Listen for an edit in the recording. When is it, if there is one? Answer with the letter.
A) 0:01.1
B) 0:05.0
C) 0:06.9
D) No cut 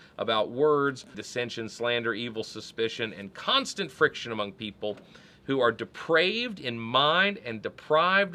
A